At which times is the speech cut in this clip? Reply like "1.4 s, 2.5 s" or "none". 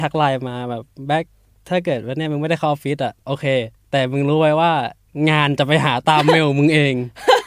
none